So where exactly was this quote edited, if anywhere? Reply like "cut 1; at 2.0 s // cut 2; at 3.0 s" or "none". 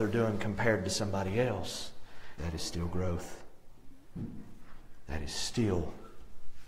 cut 1; at 2.4 s